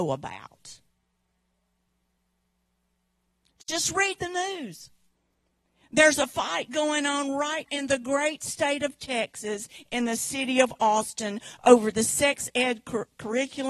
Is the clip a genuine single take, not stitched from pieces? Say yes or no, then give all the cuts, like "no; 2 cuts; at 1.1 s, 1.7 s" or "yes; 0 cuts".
no; 1 cut; at 7.7 s